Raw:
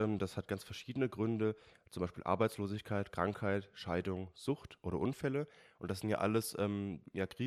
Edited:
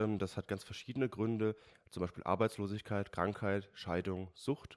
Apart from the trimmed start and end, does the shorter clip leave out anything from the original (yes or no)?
no